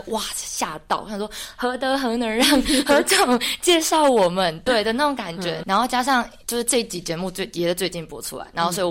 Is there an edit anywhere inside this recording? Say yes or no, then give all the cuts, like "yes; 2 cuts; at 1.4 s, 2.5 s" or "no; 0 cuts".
no; 0 cuts